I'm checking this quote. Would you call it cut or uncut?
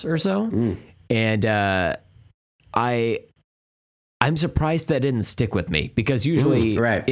uncut